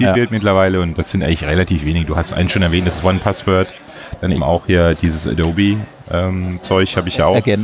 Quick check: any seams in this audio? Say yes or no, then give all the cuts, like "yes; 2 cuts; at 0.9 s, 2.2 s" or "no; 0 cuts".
yes; 1 cut; at 4.3 s